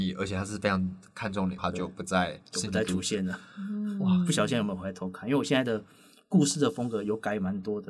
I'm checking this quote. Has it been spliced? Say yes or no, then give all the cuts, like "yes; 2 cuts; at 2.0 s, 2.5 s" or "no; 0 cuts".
yes; 1 cut; at 1.6 s